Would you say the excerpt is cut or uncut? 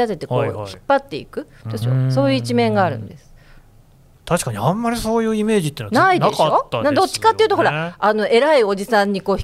cut